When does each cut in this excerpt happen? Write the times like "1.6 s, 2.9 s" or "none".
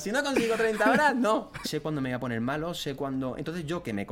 1.6 s